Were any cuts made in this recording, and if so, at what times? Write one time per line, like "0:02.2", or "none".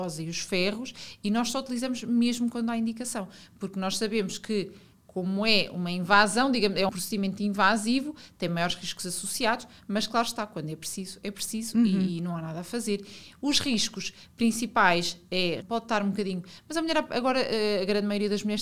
0:06.9
0:15.6